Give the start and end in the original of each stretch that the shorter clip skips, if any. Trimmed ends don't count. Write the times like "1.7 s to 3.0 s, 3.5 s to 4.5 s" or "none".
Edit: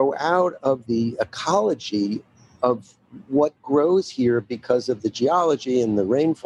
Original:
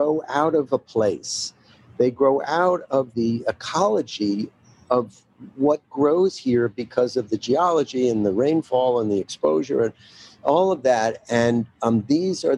none